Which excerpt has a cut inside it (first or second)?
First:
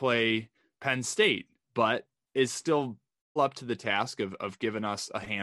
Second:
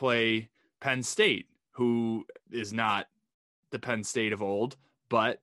first